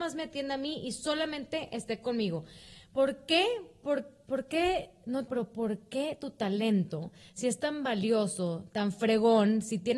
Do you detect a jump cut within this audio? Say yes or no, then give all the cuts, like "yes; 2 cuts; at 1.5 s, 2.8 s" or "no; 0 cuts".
yes; 1 cut; at 5.3 s